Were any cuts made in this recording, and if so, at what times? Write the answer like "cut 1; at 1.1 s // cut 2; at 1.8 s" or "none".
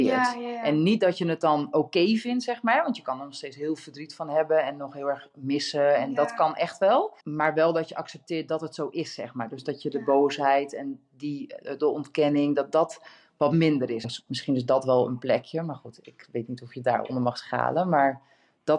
cut 1; at 7.2 s // cut 2; at 14.0 s